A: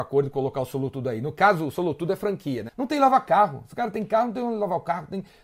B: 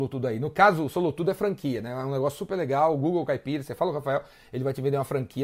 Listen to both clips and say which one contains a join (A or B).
A